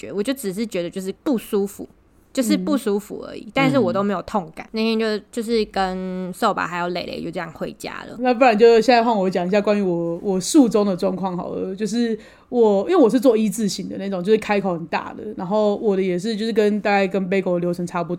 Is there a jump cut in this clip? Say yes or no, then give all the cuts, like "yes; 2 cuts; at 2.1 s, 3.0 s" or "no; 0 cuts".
yes; 1 cut; at 1.2 s